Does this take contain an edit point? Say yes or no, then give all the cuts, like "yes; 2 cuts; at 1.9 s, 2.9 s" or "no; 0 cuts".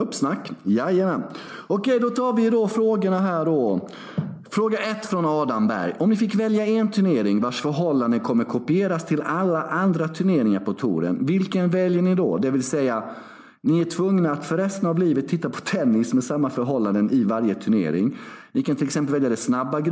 no; 0 cuts